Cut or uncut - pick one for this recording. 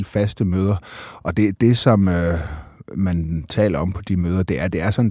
uncut